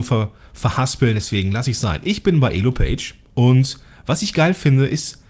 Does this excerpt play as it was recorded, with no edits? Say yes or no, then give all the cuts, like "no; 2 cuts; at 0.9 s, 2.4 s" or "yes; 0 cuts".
yes; 0 cuts